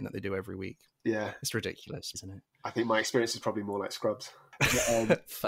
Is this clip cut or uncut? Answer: cut